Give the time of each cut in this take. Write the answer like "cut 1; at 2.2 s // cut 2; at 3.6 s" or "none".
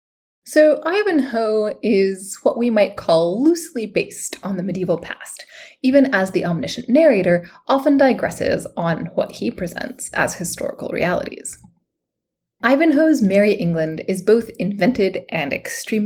none